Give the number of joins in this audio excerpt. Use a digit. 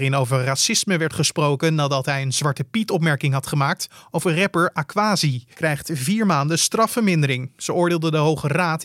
1